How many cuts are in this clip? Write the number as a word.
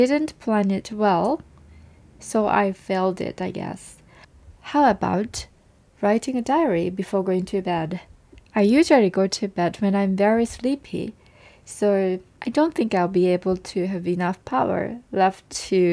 zero